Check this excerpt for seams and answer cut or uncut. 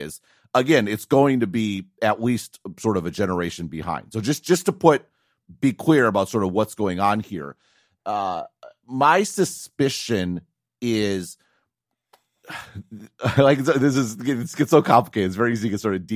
uncut